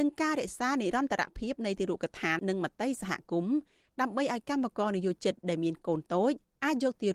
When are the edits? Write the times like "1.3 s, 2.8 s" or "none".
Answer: 2.4 s